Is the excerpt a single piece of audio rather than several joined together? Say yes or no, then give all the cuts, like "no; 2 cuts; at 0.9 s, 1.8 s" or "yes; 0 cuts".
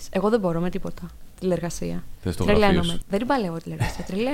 no; 1 cut; at 3.0 s